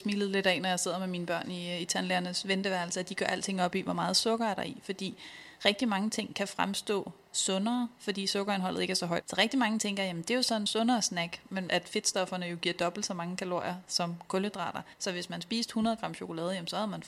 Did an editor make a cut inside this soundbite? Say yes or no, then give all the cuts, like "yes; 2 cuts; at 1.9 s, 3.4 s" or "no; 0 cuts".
yes; 3 cuts; at 9.2 s, 11.7 s, 14.9 s